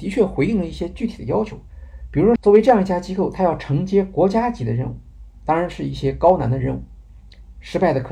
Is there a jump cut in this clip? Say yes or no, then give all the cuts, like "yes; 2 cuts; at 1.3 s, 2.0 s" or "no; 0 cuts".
yes; 1 cut; at 2.4 s